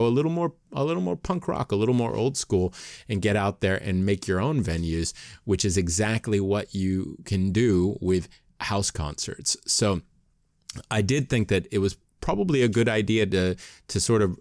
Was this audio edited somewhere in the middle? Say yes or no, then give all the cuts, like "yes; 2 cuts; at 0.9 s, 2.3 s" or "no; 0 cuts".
no; 0 cuts